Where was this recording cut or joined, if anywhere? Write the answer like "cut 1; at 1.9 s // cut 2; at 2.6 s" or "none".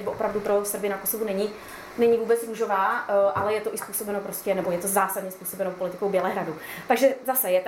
none